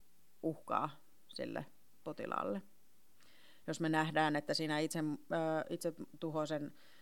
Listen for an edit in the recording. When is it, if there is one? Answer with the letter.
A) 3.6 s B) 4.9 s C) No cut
A